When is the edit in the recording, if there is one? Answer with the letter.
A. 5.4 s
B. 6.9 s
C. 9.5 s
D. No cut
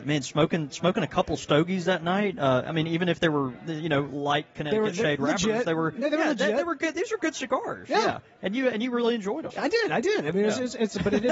C